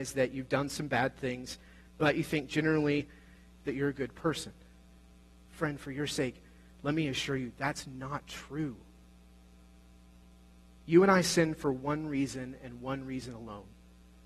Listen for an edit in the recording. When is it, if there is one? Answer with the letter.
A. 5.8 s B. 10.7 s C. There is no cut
C